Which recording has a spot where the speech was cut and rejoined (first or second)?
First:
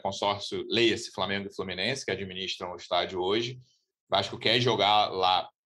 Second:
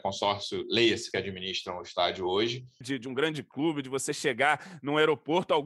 second